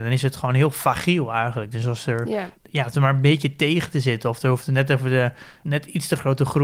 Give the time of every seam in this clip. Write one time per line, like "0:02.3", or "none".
none